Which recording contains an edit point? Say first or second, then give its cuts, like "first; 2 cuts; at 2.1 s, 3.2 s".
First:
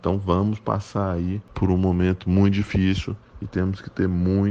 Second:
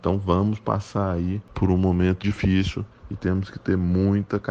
second; 1 cut; at 2.2 s